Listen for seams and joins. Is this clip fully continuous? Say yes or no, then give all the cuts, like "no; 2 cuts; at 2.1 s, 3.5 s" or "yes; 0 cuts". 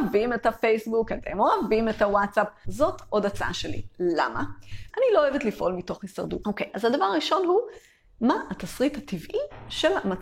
no; 3 cuts; at 2.6 s, 4.9 s, 6.4 s